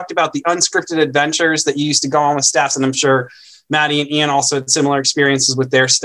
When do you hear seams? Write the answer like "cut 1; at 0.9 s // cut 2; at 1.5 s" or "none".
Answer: none